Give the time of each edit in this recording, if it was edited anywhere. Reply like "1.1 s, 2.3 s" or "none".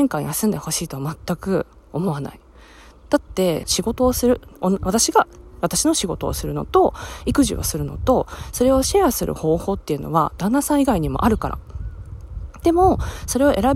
3.6 s